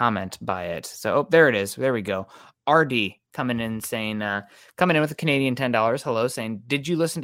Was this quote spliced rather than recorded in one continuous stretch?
no; 0 cuts

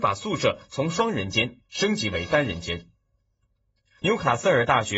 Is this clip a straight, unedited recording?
no; 1 cut; at 4.0 s

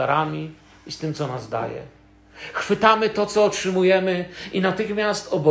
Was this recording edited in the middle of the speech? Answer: no; 0 cuts

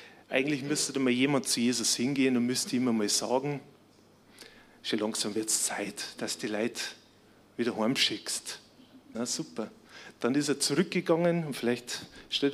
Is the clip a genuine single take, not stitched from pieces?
no; 1 cut; at 9.1 s

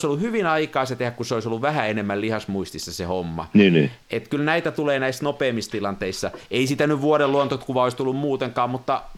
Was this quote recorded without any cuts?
yes; 0 cuts

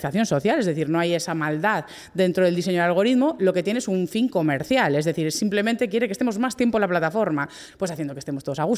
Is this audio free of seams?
no; 1 cut; at 7.7 s

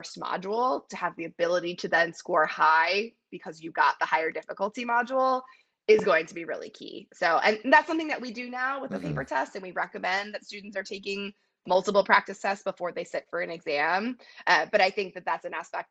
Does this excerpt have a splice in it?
no; 0 cuts

